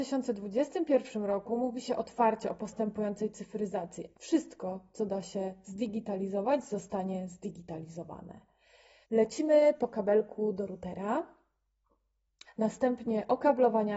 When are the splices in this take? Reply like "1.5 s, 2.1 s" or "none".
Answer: 4.1 s, 9.0 s, 12.5 s